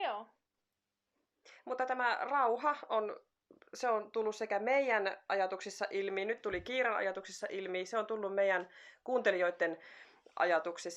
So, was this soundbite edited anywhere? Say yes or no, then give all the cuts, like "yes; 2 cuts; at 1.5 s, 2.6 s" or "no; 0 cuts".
no; 0 cuts